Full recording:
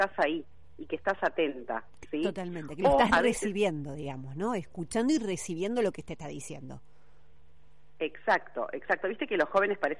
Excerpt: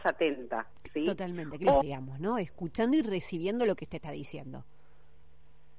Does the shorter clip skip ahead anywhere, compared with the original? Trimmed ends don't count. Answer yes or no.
yes